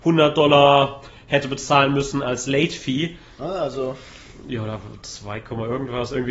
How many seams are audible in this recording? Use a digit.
1